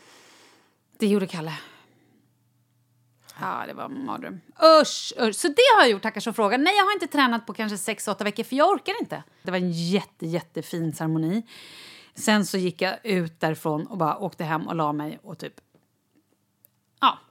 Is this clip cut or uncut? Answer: cut